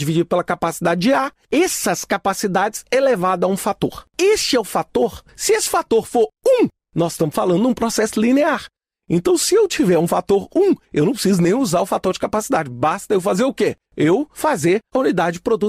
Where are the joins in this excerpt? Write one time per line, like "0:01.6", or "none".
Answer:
0:04.1

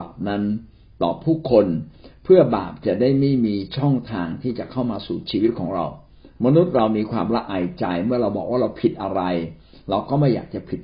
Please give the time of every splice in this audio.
none

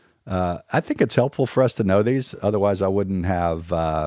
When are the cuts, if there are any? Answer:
none

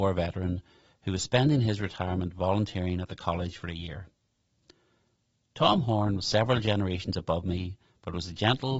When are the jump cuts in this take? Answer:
none

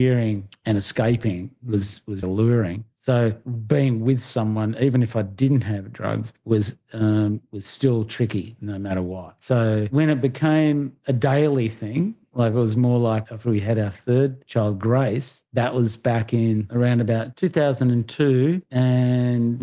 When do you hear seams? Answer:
0:02.2

